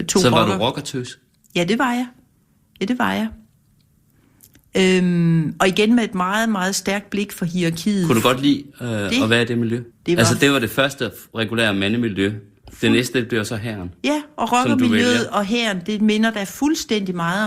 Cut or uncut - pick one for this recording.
cut